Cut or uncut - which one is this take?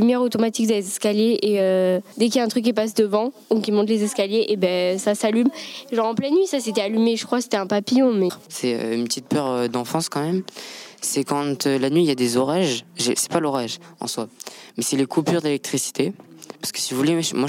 uncut